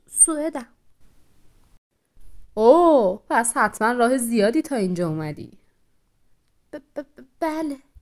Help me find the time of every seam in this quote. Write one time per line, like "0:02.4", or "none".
none